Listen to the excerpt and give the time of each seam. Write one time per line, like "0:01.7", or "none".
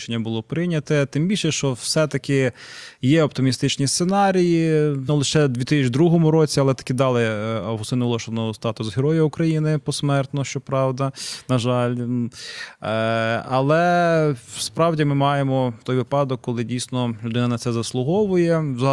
0:05.1